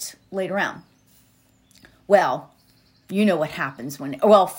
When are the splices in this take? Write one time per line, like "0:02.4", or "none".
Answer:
none

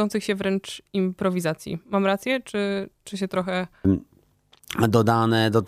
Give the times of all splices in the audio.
0:03.8

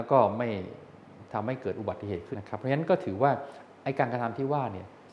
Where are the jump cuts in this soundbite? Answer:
0:02.3

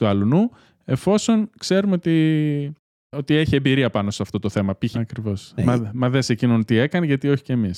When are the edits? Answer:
0:04.9

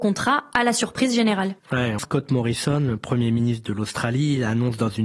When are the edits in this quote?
0:02.0

